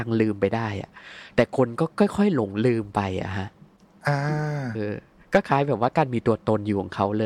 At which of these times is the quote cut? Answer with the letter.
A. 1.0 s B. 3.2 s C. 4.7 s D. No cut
C